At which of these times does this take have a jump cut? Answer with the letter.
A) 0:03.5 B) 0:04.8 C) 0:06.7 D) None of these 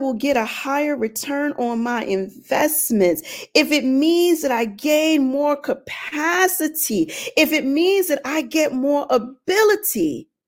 D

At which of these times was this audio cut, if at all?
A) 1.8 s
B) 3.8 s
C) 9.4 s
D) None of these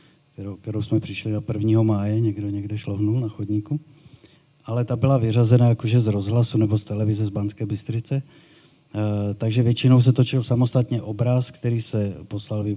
D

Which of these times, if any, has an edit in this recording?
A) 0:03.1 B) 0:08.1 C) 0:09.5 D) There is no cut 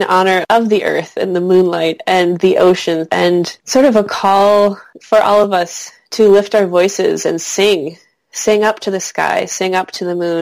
A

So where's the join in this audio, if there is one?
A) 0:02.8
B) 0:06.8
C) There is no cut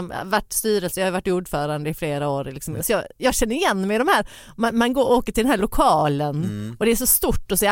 A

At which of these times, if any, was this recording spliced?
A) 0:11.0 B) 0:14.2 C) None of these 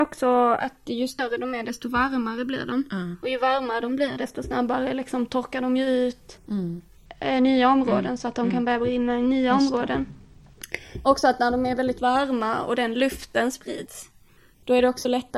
C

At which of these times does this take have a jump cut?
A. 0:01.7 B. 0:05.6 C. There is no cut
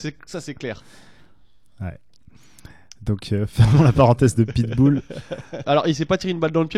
B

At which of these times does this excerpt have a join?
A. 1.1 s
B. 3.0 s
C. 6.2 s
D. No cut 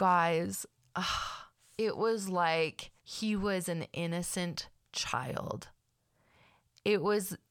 B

